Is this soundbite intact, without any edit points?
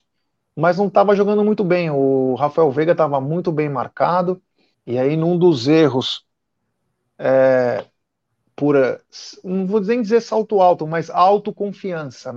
no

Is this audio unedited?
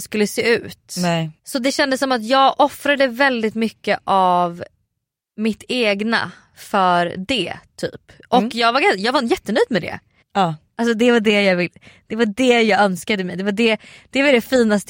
no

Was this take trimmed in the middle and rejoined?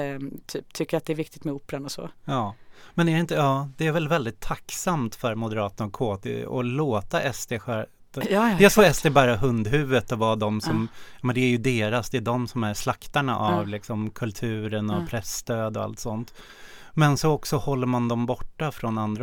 no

